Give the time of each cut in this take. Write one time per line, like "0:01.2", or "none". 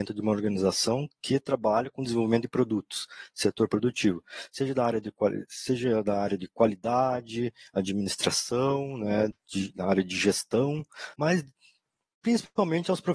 0:09.3
0:11.1